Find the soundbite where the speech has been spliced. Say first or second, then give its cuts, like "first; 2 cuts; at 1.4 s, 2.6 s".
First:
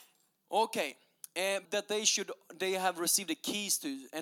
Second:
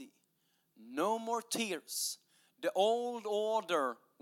first; 1 cut; at 1.6 s